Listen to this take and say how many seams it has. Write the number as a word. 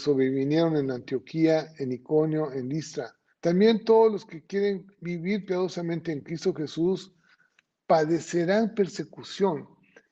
one